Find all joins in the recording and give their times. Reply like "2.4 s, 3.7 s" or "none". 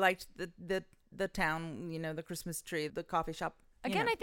2.9 s